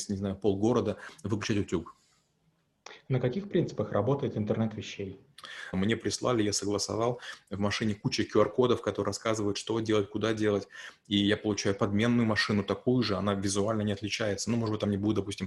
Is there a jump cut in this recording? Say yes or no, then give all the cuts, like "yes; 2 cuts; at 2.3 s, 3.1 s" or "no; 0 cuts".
yes; 1 cut; at 5.7 s